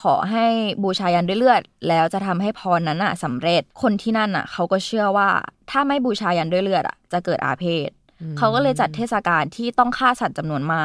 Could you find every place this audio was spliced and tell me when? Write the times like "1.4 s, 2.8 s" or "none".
3.7 s

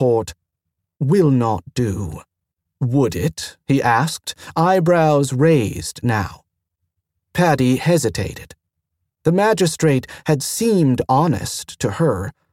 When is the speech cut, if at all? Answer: 2.7 s

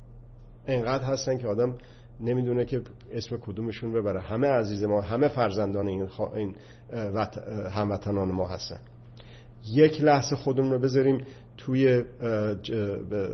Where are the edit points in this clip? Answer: none

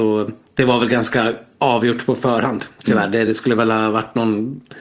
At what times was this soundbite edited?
none

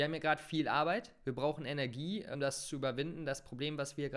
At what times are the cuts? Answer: 2.3 s

